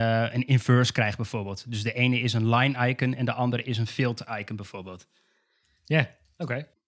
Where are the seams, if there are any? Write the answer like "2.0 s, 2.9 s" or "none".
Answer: none